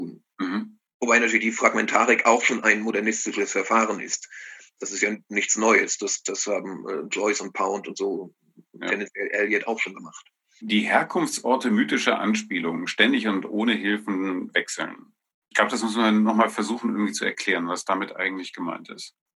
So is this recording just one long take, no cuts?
yes; 0 cuts

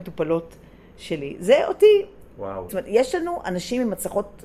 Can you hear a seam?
yes; 1 cut; at 2.7 s

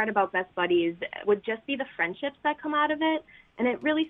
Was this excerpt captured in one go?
no; 1 cut; at 1.2 s

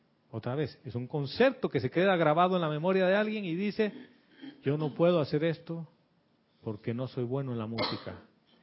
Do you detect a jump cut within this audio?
no; 0 cuts

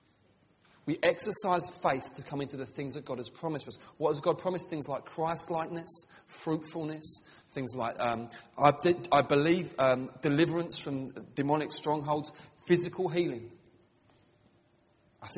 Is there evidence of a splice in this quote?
no; 0 cuts

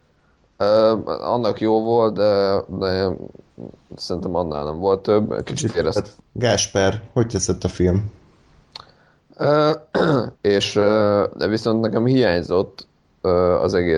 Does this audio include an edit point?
yes; 2 cuts; at 6.2 s, 10.3 s

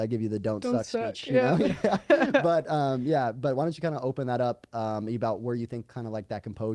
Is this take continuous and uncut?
yes; 0 cuts

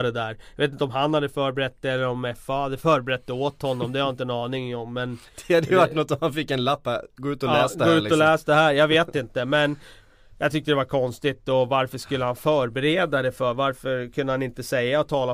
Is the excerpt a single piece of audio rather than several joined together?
yes; 0 cuts

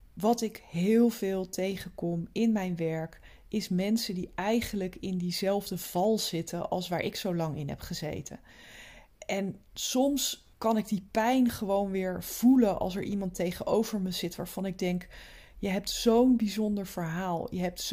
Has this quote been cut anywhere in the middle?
yes; 1 cut; at 10.5 s

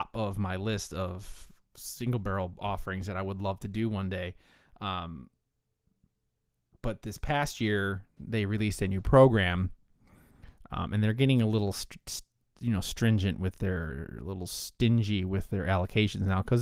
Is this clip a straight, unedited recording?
yes; 0 cuts

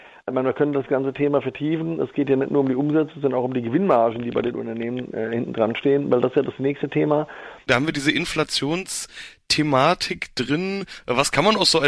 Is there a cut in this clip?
yes; 1 cut; at 7.7 s

